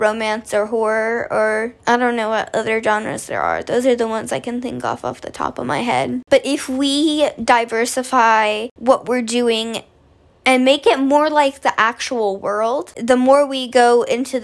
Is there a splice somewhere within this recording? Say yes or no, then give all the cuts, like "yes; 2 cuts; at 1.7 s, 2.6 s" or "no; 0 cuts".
yes; 2 cuts; at 1.8 s, 12.9 s